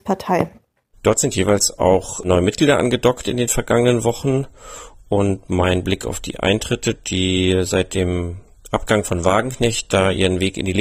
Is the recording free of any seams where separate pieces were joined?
no; 1 cut; at 0.9 s

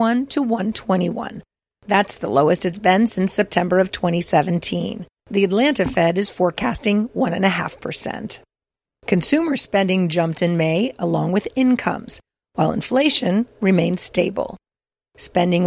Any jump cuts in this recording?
yes; 1 cut; at 5.2 s

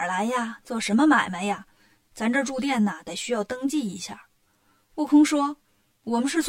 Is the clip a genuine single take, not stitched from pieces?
yes; 0 cuts

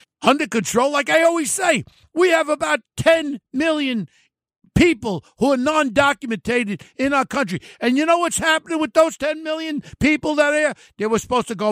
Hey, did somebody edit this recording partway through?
no; 0 cuts

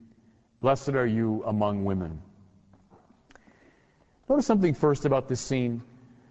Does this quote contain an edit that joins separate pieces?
no; 0 cuts

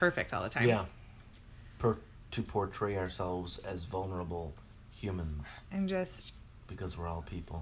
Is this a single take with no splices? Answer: no; 1 cut; at 5.7 s

